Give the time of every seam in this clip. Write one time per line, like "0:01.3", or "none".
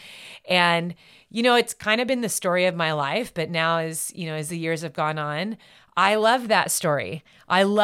none